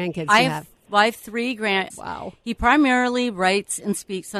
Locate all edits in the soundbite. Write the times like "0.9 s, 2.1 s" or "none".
1.9 s